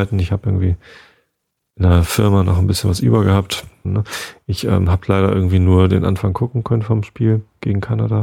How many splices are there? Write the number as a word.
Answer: one